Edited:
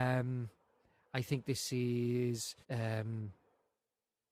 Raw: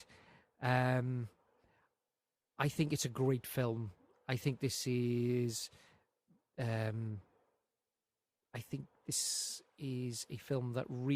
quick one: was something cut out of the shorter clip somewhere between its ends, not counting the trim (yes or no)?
yes